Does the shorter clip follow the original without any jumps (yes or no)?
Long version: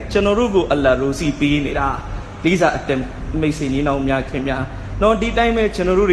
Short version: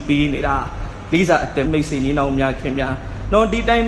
no